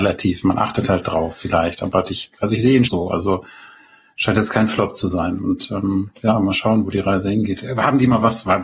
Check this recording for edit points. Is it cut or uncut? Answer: cut